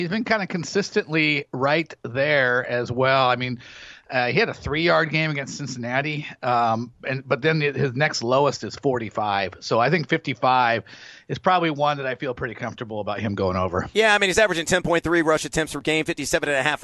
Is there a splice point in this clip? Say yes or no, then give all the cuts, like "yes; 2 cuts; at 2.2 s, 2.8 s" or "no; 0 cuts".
no; 0 cuts